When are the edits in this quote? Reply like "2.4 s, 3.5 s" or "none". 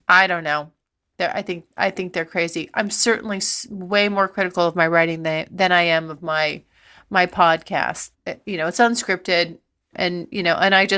8.1 s, 9.9 s